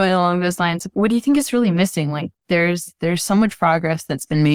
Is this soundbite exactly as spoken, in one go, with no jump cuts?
yes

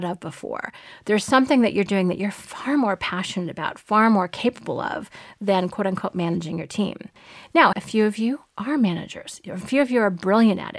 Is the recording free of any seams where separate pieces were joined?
no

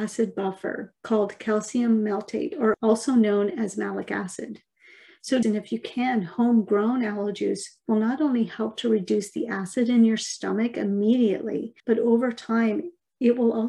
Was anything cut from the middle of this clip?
yes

